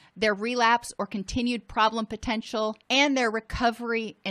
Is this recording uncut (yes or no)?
no